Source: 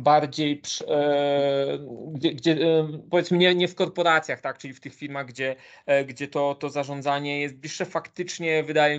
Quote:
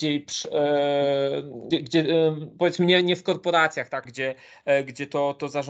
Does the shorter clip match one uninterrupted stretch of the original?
no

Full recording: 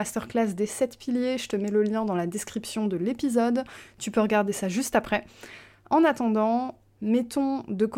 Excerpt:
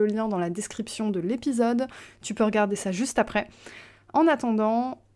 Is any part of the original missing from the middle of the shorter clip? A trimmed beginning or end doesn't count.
no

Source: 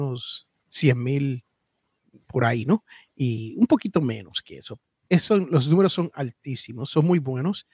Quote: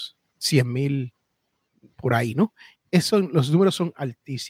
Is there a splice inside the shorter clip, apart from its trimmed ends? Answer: yes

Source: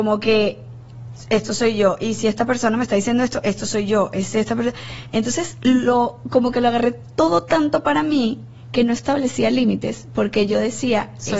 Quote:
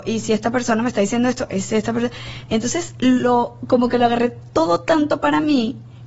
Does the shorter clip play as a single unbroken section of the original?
no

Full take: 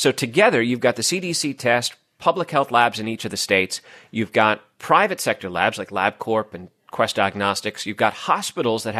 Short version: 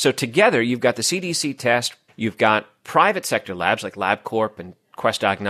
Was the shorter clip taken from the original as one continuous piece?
no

